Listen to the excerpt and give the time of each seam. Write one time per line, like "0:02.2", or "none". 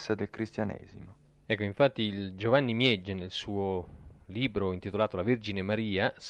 0:01.5